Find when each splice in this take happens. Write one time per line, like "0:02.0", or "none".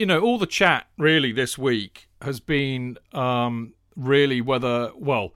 none